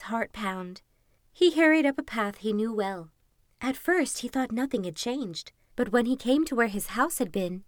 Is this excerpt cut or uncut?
cut